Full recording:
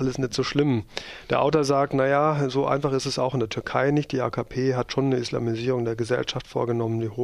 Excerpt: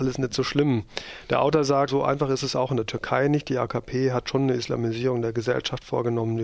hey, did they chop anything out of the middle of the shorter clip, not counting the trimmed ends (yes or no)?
yes